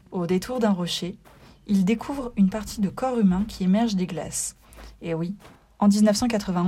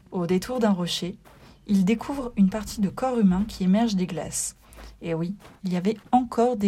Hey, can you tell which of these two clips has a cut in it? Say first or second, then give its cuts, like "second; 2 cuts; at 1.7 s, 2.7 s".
second; 1 cut; at 5.6 s